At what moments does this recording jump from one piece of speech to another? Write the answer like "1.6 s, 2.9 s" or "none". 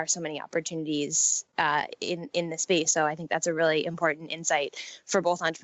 2.9 s